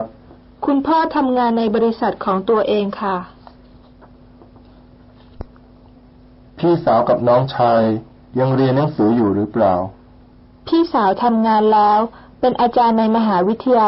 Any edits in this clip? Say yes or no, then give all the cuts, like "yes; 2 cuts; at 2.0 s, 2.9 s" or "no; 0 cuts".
no; 0 cuts